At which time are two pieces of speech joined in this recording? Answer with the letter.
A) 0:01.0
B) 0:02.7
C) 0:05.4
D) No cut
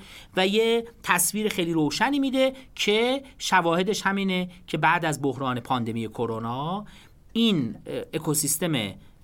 D